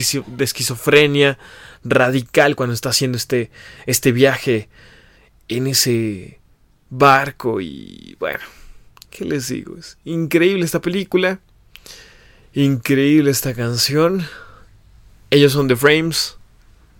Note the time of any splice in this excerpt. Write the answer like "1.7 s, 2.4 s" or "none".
none

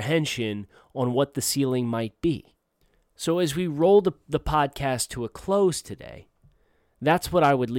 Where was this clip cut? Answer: none

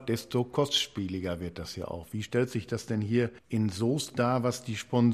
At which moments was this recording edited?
3.4 s

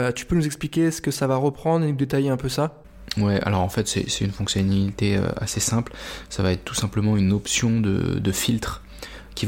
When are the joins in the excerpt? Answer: none

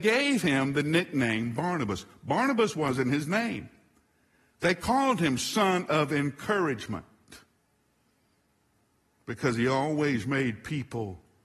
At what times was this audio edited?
none

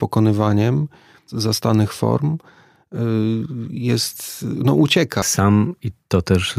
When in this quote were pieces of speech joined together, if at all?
5.2 s

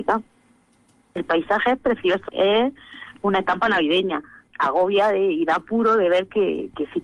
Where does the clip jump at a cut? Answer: 2.3 s, 4.5 s

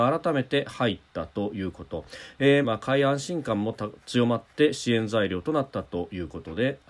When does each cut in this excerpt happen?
2.6 s

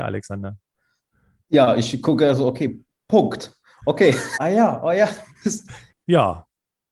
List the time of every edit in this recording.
4.3 s, 5.9 s

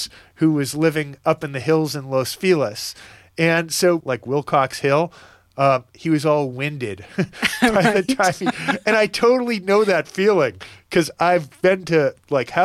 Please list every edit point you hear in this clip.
4.0 s

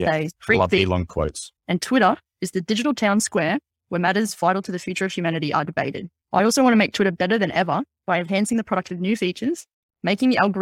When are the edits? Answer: 1.6 s

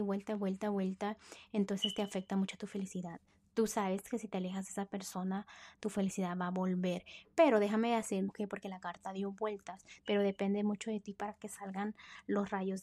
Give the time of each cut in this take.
8.3 s, 10.0 s

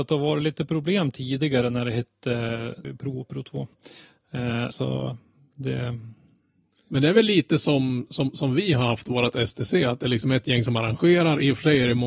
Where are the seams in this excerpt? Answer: 2.8 s, 4.7 s

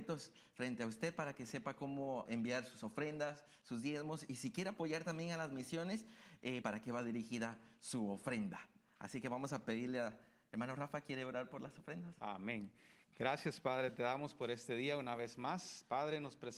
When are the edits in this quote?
2.3 s, 6.6 s

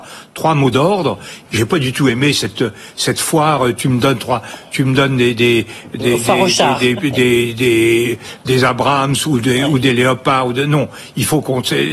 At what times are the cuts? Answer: 1.5 s

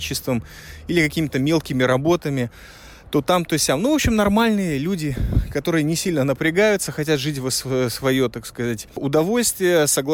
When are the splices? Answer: none

